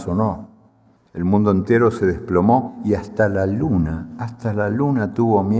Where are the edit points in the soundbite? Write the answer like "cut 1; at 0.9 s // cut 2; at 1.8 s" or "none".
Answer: cut 1; at 1.0 s